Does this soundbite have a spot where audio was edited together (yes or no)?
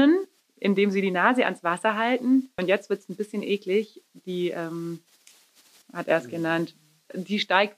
yes